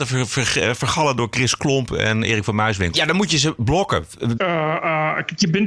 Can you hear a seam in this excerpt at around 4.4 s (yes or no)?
yes